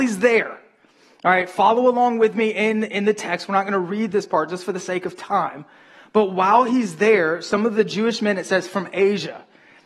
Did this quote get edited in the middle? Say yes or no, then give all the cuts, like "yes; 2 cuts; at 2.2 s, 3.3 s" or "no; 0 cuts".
no; 0 cuts